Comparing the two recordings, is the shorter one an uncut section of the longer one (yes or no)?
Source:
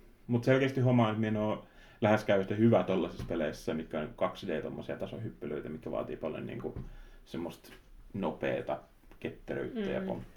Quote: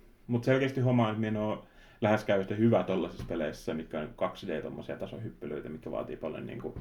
yes